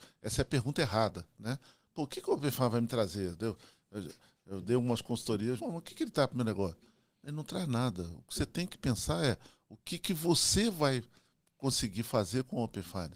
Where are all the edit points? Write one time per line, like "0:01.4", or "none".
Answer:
0:05.6